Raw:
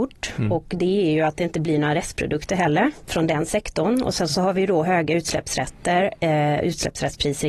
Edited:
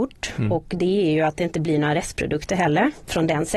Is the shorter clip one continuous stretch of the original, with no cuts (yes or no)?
yes